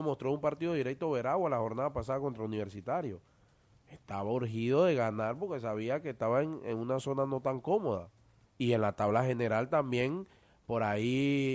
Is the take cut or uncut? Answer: cut